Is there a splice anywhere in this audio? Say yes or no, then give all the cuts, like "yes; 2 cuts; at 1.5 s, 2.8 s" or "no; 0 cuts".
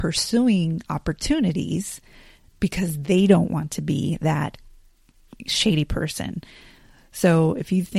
no; 0 cuts